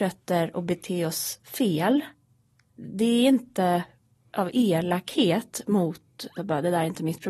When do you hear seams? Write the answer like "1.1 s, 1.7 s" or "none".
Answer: 6.4 s